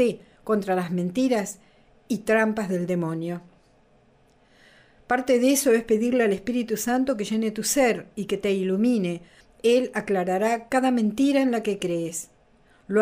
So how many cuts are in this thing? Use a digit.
1